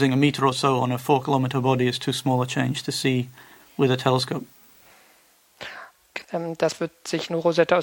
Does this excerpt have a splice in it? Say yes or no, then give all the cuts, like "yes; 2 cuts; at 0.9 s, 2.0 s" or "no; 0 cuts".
yes; 1 cut; at 6.2 s